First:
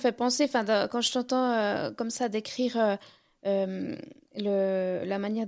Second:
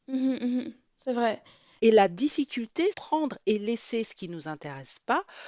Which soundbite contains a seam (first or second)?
second